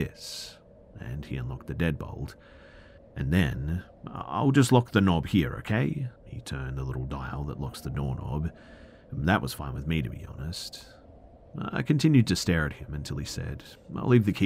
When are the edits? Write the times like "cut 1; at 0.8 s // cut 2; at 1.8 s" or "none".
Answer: cut 1; at 6.2 s

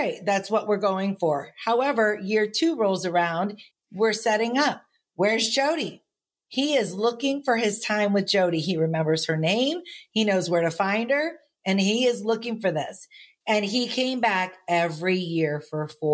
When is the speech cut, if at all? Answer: cut 1; at 3.7 s // cut 2; at 13.4 s

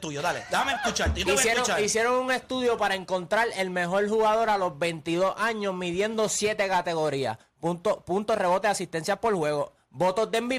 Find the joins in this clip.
none

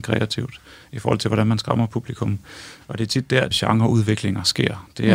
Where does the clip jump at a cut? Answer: cut 1; at 3.5 s

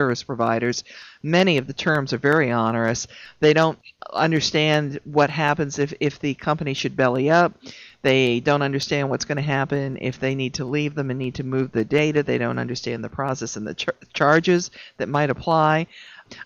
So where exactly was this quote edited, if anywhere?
none

